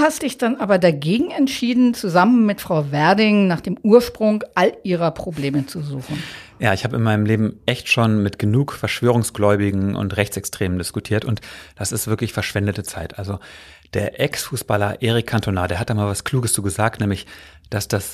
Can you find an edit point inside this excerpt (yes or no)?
no